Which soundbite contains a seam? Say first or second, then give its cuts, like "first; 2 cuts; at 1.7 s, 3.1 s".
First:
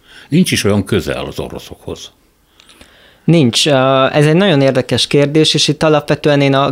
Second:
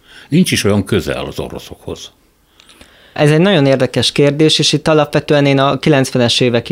second; 1 cut; at 3.2 s